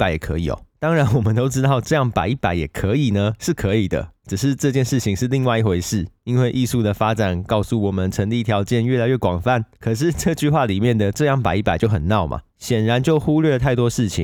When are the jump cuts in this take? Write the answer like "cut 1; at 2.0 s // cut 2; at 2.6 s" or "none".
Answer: none